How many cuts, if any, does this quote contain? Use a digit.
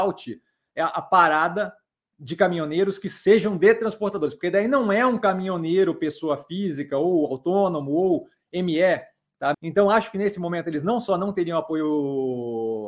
1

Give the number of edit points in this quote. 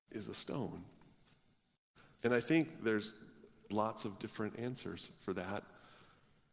2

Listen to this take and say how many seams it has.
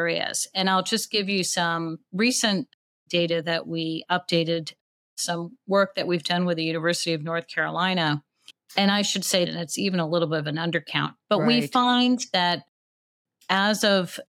2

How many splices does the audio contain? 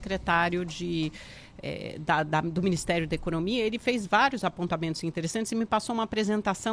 0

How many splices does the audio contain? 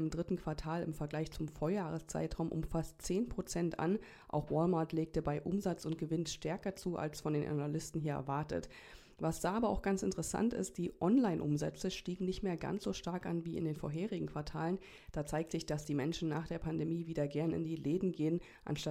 0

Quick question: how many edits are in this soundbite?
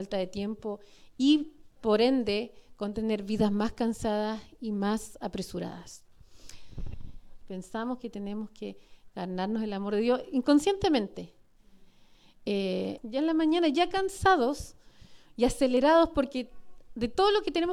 2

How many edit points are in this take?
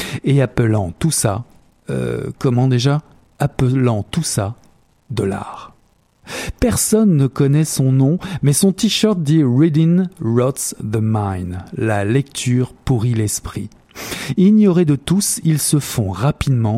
0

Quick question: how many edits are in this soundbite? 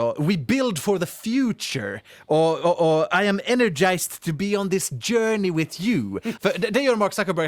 1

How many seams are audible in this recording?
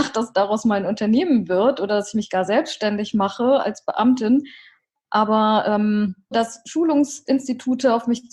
1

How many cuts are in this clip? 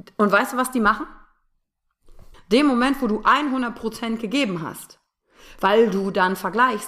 1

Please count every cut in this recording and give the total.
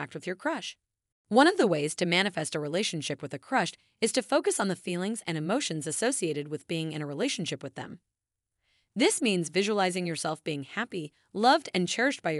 1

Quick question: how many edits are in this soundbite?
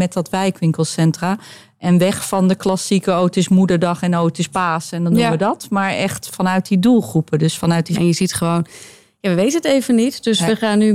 1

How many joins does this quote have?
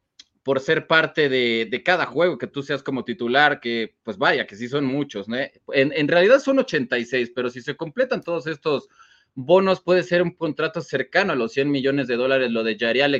0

